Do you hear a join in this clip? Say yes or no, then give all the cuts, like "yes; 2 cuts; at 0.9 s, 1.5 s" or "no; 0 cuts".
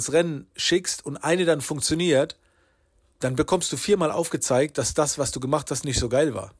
no; 0 cuts